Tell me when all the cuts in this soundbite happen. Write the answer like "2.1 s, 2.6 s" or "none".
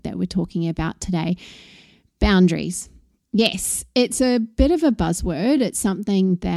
none